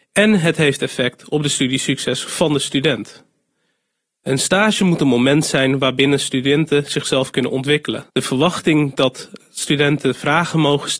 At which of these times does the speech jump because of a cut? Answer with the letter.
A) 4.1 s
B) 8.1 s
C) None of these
B